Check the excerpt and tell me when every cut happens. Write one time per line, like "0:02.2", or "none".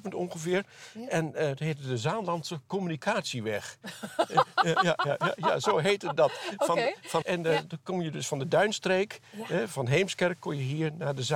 0:07.2